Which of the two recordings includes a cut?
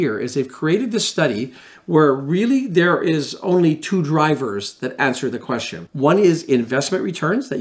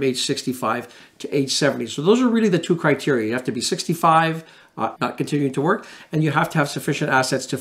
second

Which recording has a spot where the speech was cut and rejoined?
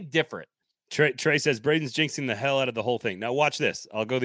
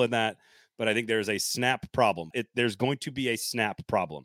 second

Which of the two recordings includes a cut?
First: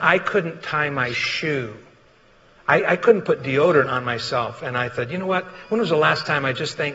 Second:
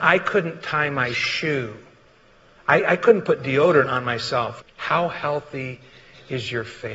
second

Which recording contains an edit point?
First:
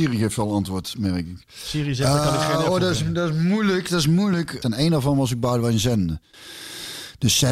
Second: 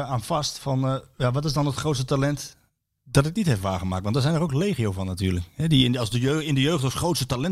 first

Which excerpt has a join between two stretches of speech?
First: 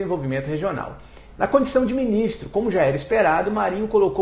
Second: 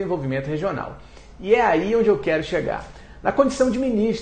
first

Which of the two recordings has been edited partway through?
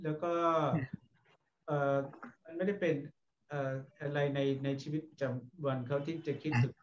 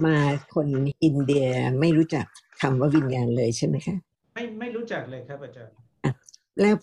first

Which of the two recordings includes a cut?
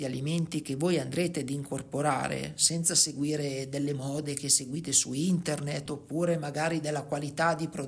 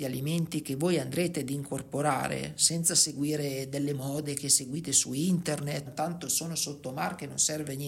second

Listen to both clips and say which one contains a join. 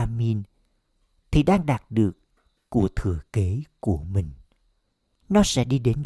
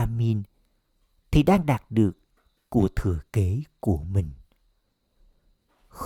first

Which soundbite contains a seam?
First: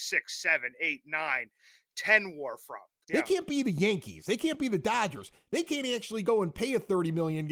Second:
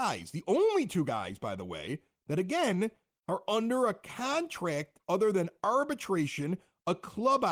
first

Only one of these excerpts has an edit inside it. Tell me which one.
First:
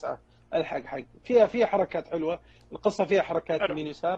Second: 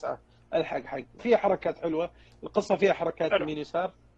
second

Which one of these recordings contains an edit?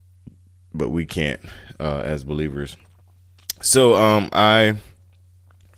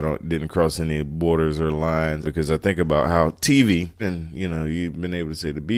second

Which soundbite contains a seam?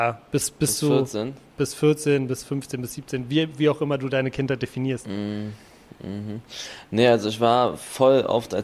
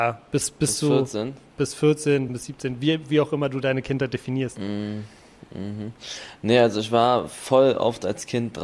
second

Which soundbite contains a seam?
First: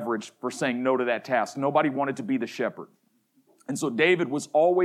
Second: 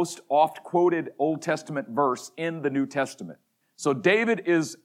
second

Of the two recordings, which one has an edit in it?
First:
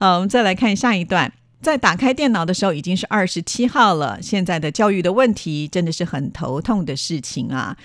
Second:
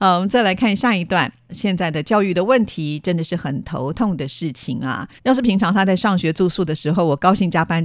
second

